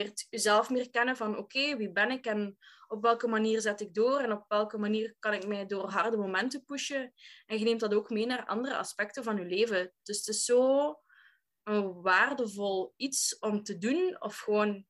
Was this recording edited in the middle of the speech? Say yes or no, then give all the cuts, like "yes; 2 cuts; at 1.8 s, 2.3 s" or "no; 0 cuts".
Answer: no; 0 cuts